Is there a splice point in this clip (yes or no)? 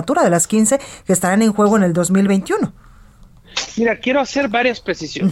no